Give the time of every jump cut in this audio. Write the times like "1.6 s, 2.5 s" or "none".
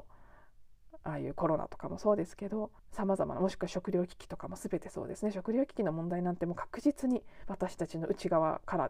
2.8 s